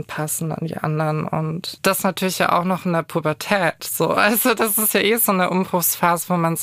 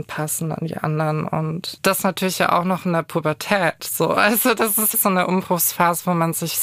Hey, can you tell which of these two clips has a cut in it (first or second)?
second